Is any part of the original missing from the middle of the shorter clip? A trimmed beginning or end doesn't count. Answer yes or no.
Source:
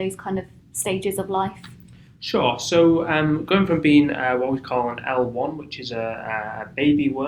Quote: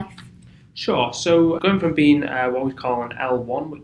yes